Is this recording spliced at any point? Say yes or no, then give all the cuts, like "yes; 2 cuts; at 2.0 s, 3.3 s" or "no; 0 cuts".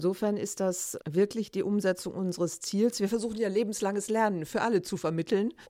no; 0 cuts